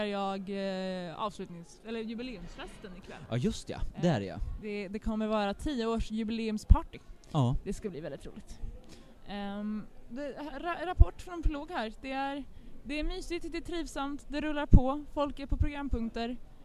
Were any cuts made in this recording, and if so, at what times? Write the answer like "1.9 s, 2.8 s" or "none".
10.1 s